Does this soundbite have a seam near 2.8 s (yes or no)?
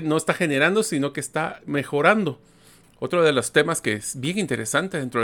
yes